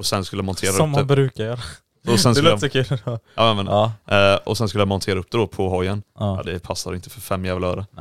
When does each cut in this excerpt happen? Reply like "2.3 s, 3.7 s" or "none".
6.4 s